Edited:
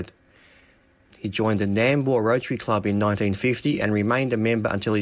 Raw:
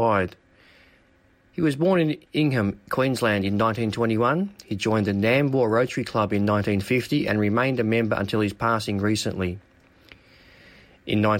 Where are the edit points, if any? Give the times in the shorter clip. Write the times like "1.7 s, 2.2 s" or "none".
1.1 s